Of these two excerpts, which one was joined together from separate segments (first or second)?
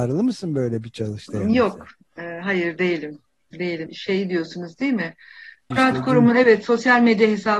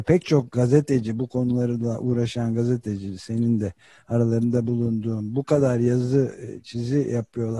first